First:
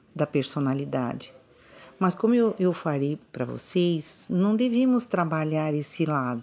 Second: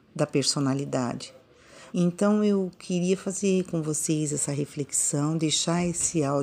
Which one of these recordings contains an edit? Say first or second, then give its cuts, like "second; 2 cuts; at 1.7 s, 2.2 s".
second; 1 cut; at 1.9 s